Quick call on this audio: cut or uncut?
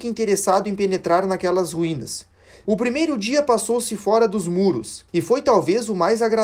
cut